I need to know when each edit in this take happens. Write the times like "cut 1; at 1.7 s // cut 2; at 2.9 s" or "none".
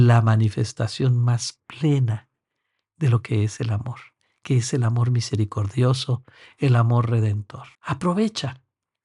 cut 1; at 7.7 s